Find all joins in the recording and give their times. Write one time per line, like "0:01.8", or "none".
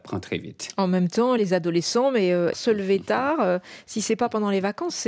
0:01.4
0:02.5